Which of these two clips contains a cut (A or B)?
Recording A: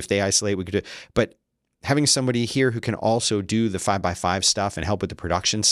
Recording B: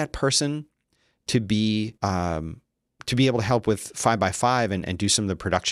B